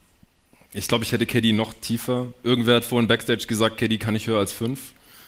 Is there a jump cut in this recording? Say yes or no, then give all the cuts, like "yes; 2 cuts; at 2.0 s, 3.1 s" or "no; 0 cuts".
no; 0 cuts